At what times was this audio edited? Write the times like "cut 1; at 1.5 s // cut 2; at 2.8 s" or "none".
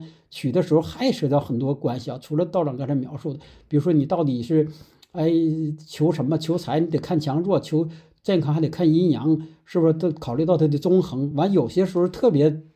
none